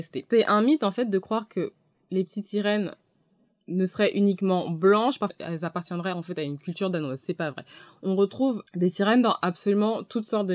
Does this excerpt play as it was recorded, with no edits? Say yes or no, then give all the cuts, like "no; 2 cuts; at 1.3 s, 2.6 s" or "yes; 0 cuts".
yes; 0 cuts